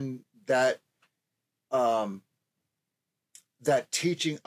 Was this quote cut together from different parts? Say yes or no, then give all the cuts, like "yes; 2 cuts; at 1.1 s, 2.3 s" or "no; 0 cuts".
no; 0 cuts